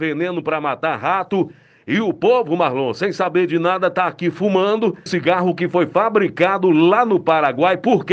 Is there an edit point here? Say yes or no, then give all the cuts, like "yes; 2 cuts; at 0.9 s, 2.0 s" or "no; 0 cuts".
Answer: yes; 1 cut; at 5.1 s